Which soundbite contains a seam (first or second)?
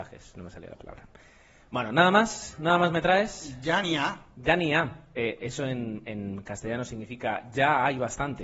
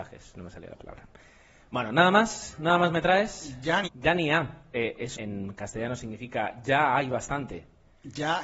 second